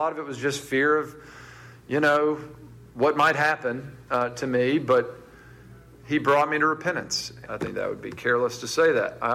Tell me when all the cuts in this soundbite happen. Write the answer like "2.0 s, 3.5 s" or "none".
7.4 s